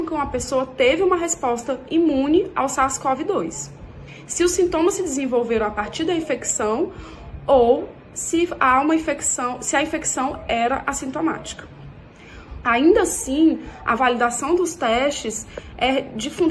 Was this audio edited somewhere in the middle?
yes; 1 cut; at 12.6 s

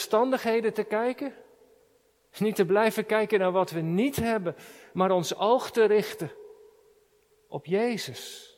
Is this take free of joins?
yes; 0 cuts

